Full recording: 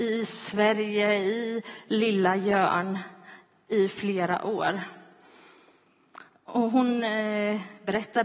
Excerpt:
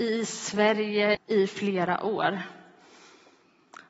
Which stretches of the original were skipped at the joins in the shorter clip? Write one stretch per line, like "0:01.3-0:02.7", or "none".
0:01.1-0:03.6